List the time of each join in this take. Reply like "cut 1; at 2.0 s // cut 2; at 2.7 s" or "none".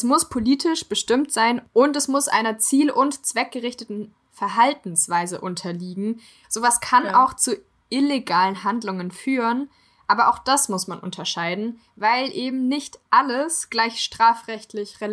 cut 1; at 6.4 s